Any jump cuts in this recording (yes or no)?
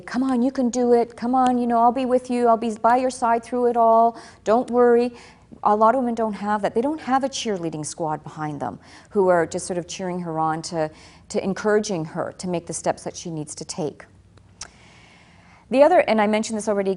no